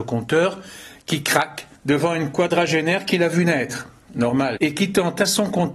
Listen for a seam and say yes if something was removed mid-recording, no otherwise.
yes